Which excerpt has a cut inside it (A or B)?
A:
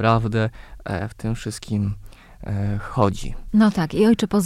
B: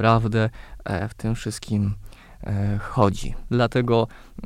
B